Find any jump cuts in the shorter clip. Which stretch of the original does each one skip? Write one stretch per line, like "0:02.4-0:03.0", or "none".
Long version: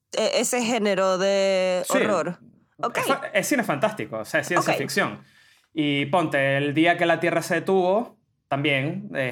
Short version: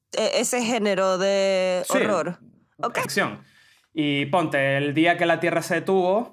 0:03.0-0:04.8